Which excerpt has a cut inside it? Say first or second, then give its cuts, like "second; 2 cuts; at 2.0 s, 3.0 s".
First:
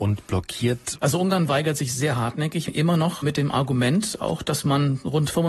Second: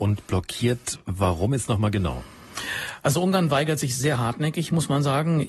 first; 2 cuts; at 1.0 s, 2.7 s